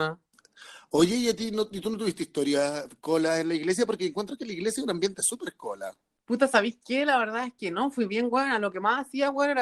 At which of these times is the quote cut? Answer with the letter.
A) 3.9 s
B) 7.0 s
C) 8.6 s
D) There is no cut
D